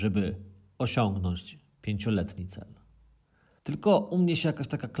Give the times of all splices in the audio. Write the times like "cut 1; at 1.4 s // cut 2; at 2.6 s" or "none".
cut 1; at 3.6 s